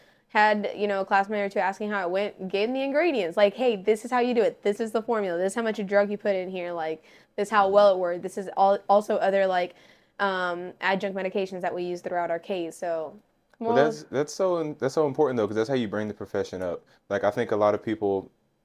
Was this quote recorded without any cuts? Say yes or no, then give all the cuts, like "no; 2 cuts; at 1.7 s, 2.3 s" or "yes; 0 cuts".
yes; 0 cuts